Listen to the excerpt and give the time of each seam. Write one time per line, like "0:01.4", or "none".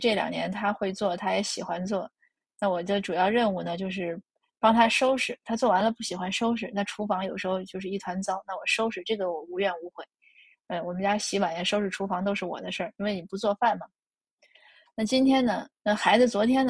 none

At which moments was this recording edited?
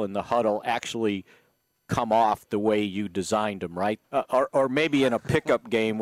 0:04.0

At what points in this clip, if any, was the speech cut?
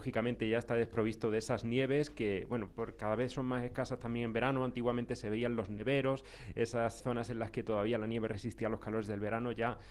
0:02.7
0:07.0

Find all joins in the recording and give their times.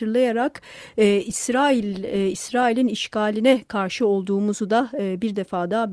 none

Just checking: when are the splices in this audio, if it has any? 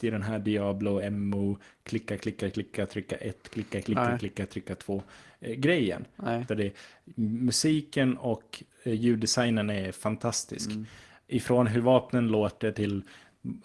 0:06.5

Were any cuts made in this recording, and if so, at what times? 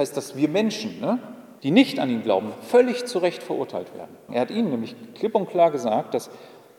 0:01.6
0:04.3

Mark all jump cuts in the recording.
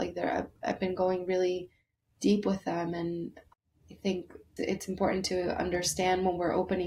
0:04.6

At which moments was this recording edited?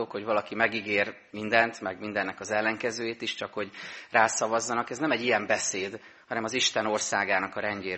none

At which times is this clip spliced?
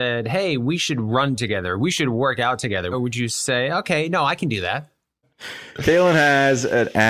0:02.9
0:05.2

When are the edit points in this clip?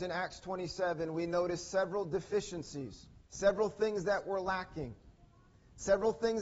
0:03.2

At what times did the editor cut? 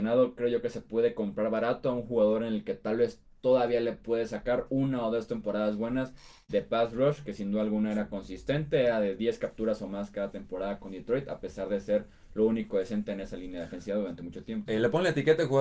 0:14.7

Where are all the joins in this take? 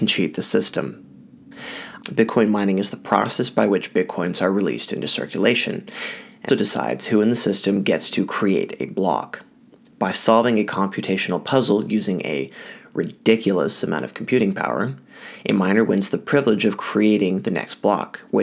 0:02.0
0:06.5

